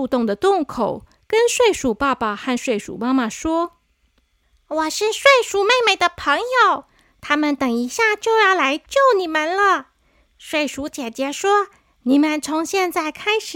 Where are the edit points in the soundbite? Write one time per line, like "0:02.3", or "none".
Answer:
none